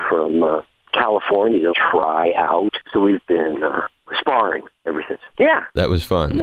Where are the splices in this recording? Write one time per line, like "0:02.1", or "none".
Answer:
0:01.7
0:02.8
0:05.3